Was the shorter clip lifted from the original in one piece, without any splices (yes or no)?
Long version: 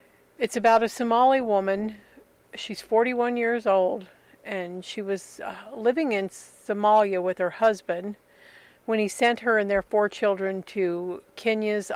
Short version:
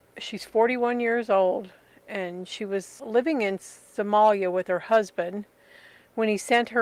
no